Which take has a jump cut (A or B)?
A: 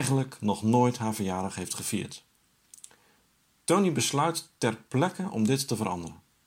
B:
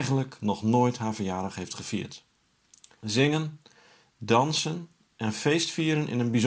B